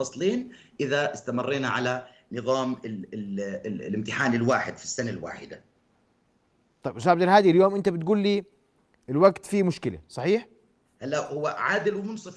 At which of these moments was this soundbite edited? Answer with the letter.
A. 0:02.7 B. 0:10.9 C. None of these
B